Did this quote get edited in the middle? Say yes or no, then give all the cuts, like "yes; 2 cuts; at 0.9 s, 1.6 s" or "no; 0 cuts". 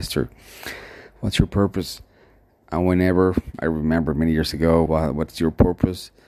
yes; 2 cuts; at 2.6 s, 4.9 s